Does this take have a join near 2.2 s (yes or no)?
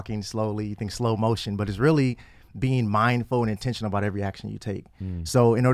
no